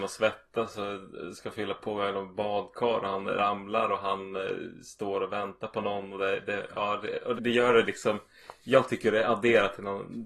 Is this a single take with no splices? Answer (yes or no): no